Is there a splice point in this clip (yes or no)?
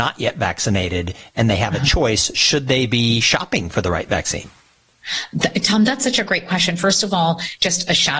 no